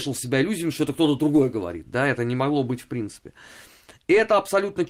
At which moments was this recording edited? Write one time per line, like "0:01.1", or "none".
none